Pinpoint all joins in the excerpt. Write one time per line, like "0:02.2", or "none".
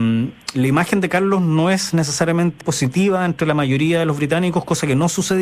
0:02.6